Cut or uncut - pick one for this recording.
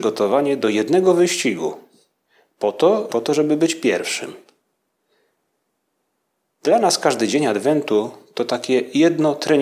cut